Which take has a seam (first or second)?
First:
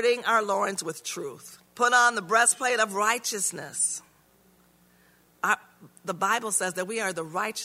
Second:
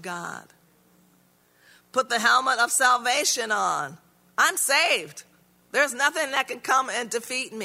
first